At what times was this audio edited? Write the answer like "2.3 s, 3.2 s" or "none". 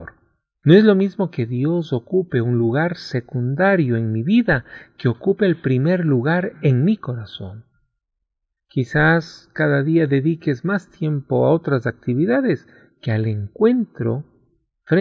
none